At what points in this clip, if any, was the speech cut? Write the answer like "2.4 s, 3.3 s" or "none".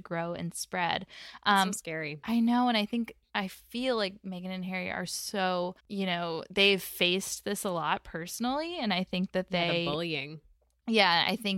5.8 s